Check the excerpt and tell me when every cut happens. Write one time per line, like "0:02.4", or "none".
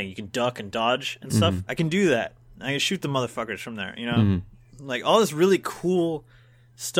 0:01.7